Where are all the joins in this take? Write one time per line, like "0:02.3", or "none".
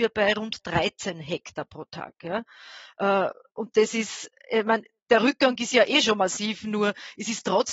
none